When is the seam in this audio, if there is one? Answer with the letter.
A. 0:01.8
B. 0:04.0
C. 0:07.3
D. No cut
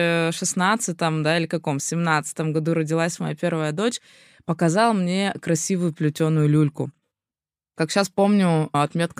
D